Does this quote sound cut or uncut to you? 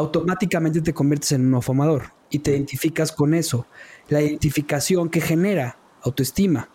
uncut